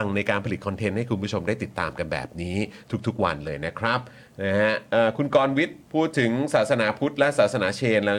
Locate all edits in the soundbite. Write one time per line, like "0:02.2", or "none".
0:05.8